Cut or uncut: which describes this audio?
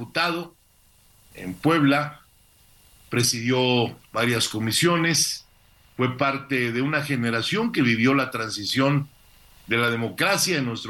cut